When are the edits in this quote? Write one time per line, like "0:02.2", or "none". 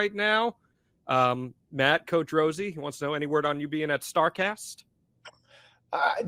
none